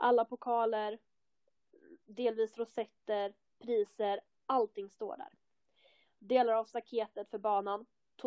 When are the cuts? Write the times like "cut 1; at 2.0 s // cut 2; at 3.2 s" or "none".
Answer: none